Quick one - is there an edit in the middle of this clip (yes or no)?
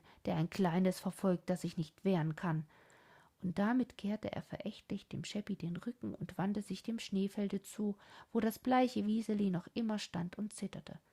no